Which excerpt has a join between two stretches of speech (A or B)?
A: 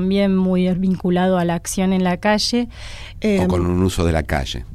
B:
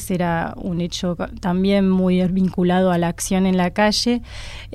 A